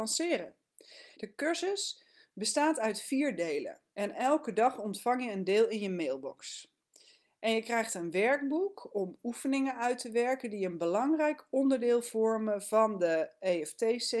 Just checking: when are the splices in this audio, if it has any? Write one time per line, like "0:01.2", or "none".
0:01.1
0:03.9